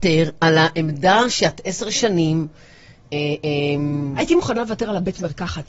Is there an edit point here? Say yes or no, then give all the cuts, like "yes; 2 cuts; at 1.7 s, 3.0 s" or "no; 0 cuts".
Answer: no; 0 cuts